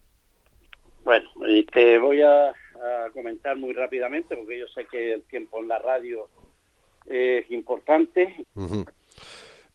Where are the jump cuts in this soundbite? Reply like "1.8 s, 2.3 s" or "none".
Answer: 8.4 s